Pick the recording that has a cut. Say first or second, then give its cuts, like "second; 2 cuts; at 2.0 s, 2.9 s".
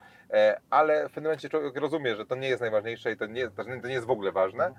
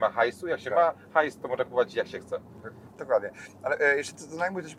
second; 1 cut; at 2.9 s